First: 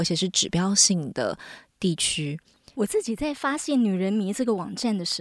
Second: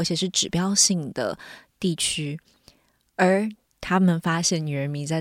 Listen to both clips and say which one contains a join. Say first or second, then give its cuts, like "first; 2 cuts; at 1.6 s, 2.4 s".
first; 1 cut; at 2.7 s